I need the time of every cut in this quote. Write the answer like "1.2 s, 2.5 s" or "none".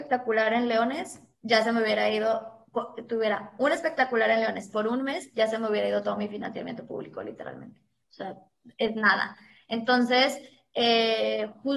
none